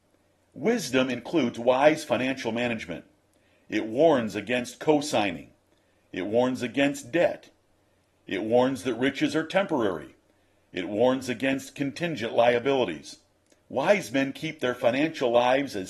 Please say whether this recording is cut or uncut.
cut